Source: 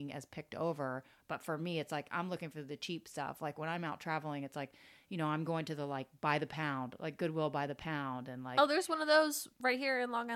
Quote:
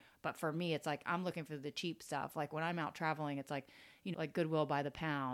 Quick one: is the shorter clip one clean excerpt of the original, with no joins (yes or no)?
no